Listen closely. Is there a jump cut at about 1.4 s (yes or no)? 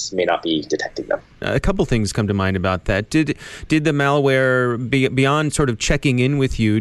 yes